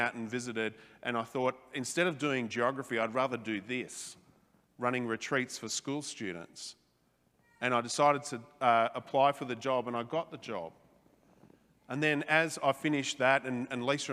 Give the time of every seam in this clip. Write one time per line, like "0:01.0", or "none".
none